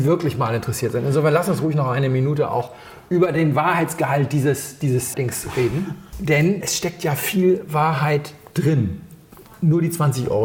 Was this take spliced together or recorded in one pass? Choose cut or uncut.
cut